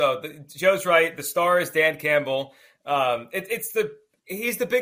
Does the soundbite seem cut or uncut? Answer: uncut